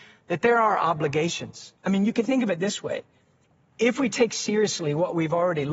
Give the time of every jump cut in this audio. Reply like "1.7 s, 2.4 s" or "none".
1.8 s